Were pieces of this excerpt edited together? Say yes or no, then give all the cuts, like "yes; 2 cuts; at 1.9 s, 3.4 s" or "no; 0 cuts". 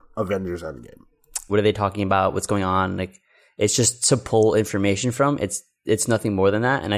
yes; 1 cut; at 1.5 s